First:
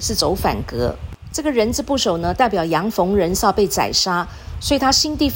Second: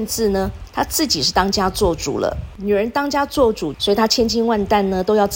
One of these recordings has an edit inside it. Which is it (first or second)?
second